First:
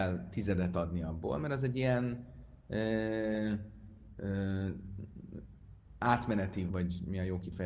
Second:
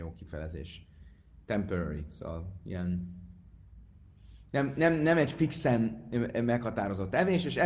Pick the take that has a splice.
first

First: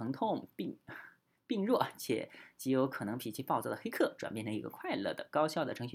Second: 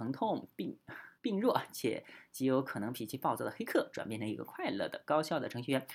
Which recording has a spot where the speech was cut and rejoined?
second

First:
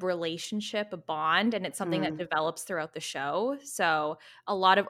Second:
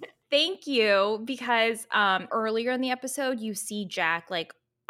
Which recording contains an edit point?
second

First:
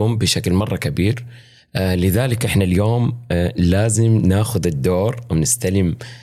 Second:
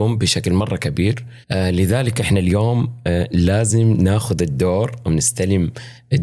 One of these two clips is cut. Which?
second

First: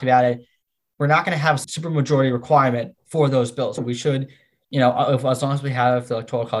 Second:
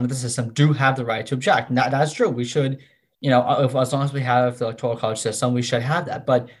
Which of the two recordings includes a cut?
first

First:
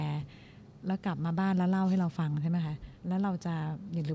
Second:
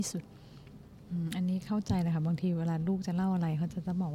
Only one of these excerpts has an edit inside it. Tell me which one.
first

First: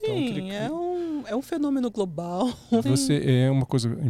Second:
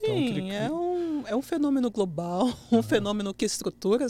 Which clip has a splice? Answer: first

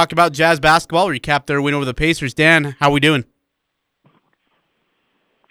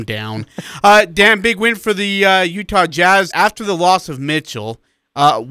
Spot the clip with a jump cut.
second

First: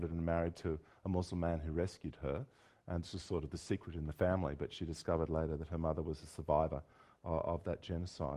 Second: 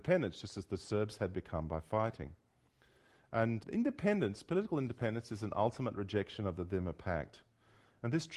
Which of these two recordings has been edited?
second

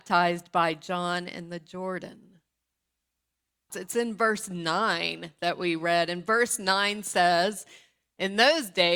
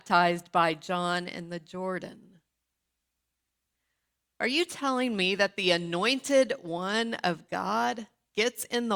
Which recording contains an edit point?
first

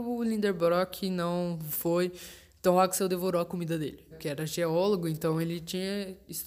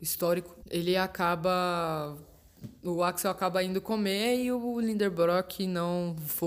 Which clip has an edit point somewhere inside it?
first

